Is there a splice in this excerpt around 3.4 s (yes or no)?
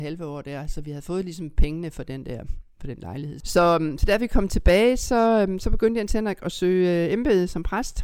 yes